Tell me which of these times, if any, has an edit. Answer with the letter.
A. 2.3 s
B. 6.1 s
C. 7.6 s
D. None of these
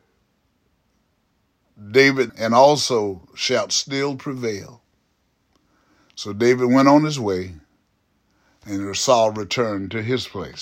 A